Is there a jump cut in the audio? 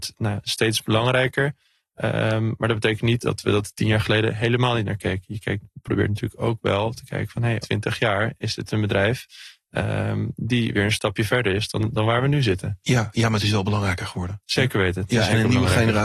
yes; 1 cut; at 7.6 s

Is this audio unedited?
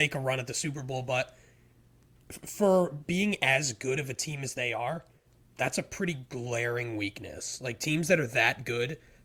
yes; 0 cuts

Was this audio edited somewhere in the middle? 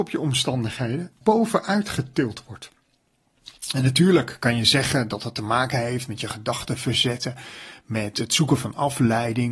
yes; 1 cut; at 1.2 s

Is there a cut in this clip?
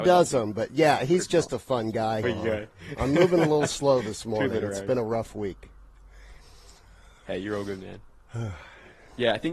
yes; 1 cut; at 2.2 s

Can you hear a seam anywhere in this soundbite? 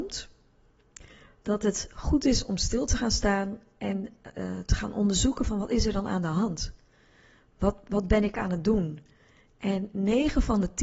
no; 0 cuts

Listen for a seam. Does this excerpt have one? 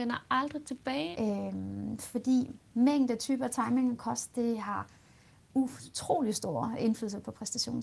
yes; 1 cut; at 1.1 s

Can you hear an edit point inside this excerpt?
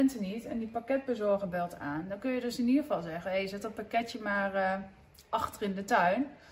no; 0 cuts

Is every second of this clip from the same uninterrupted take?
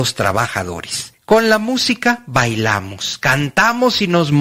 yes; 0 cuts

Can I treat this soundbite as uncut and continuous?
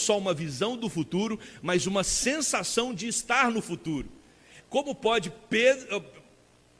no; 1 cut; at 4.6 s

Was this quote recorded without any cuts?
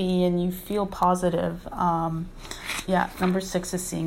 no; 1 cut; at 2.9 s

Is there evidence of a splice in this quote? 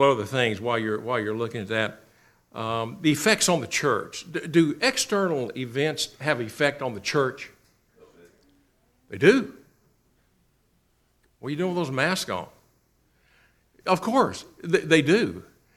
no; 0 cuts

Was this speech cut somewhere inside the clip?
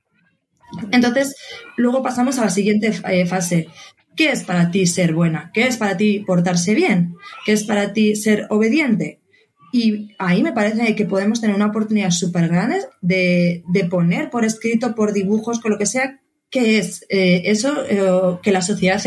no; 0 cuts

